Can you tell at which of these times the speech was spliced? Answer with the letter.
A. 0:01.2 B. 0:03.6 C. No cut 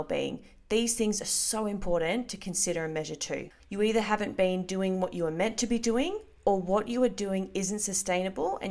B